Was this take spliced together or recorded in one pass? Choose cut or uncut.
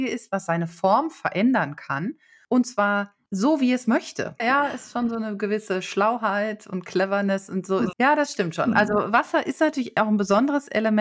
cut